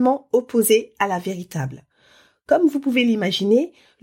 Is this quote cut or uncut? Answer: uncut